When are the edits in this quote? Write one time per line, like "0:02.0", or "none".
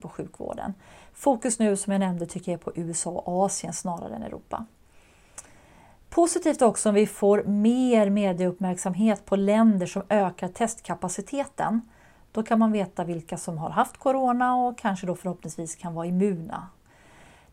none